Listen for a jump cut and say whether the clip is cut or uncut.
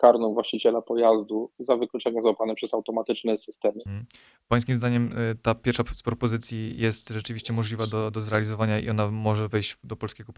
cut